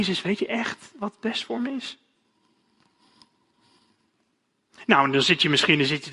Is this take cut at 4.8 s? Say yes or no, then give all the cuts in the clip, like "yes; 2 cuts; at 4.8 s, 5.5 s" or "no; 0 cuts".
no; 0 cuts